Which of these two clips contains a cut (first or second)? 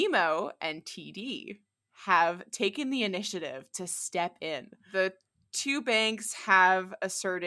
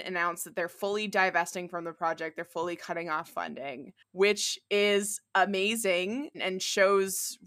second